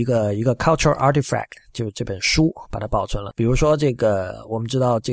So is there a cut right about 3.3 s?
yes; 1 cut; at 3.3 s

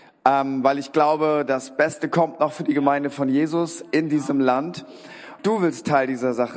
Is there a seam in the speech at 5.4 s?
yes; 1 cut; at 5.4 s

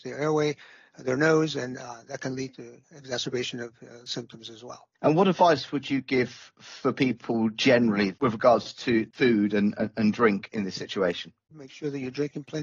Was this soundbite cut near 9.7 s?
no; 2 cuts; at 4.9 s, 11.5 s

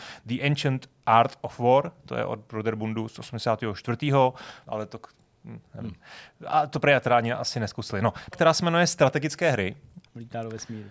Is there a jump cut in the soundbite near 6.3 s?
no; 3 cuts; at 4.7 s, 8.3 s, 10.0 s

